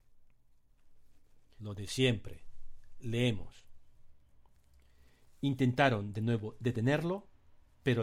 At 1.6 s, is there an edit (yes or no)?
yes